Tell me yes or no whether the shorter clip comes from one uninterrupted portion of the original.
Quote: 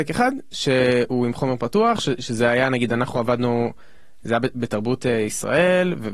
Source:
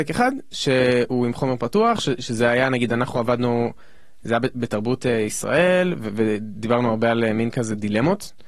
yes